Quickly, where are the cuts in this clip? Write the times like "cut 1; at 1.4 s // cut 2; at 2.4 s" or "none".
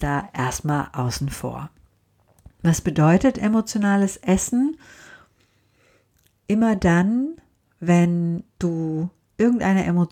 none